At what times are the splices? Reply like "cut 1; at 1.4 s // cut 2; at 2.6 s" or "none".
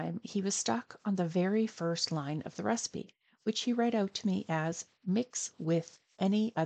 none